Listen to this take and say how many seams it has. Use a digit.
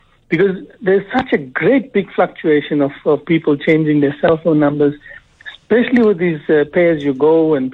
0